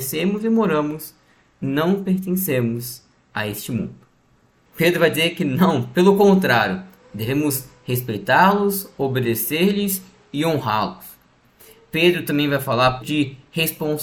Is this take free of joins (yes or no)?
no